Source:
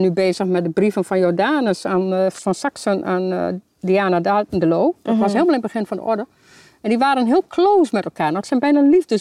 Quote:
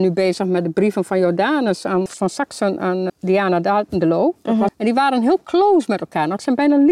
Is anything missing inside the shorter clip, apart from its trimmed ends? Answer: yes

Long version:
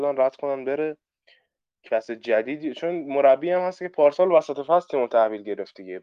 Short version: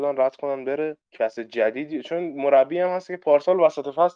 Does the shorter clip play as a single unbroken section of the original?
no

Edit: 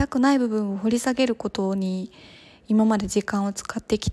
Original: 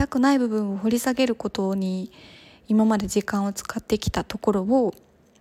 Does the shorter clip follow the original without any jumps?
yes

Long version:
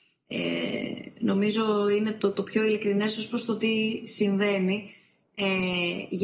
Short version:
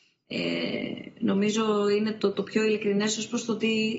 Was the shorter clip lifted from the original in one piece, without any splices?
yes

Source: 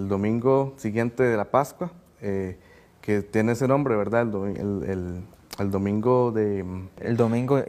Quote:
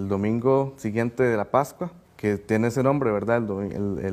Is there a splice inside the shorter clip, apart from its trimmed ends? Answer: yes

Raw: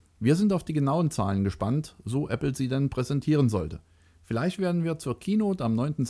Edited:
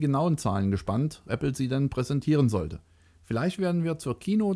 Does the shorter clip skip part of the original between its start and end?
yes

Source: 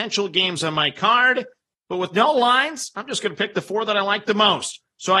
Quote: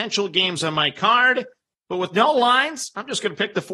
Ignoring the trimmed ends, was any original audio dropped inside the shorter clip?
no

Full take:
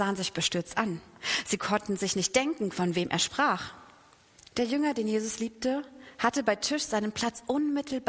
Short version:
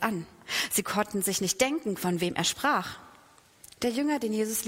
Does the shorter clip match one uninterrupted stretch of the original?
yes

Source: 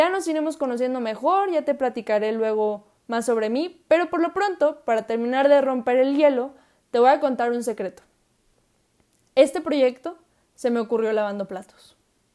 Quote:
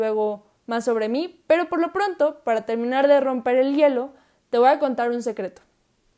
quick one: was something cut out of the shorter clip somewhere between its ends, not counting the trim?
no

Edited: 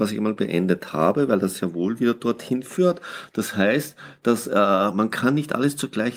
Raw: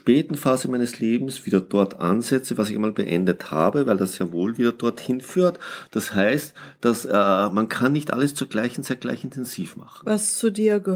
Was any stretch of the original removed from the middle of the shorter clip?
no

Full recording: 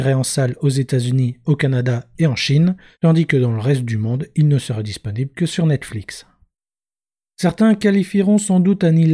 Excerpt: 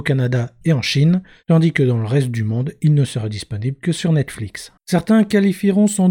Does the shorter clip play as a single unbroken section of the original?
no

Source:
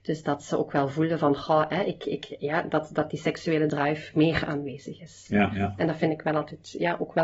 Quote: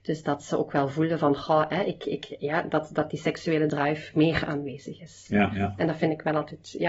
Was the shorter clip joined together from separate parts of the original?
no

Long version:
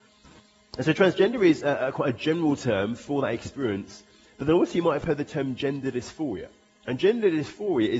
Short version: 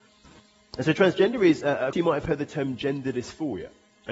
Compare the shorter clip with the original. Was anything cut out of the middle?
yes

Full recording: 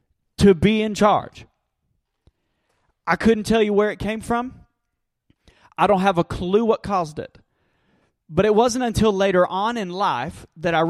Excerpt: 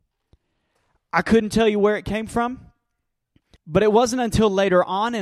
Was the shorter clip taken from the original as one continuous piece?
no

